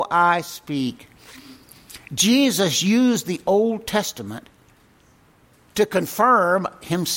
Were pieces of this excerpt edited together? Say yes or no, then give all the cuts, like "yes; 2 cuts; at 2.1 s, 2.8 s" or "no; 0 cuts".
no; 0 cuts